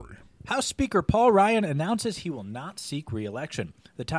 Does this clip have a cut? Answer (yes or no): no